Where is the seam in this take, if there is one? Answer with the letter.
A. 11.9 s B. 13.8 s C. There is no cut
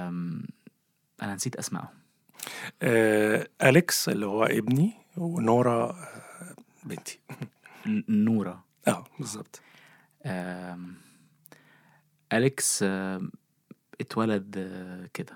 C